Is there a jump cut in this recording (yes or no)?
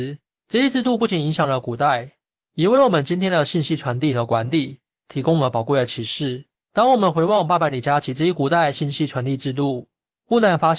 no